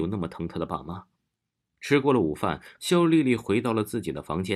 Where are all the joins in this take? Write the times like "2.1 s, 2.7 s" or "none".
1.6 s, 2.8 s

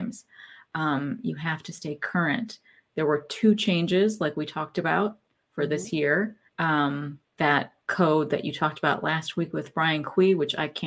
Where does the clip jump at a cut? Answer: 6.5 s, 7.8 s

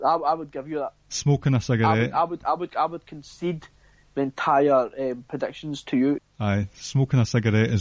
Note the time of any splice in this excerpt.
6.2 s

